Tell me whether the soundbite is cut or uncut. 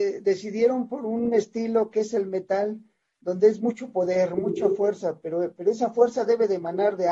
uncut